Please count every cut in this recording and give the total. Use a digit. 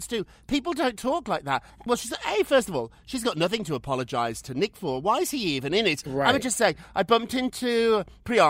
0